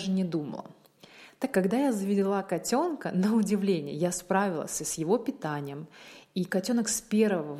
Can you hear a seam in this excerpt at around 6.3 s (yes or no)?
no